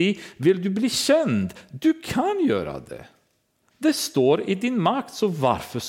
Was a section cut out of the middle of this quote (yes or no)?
no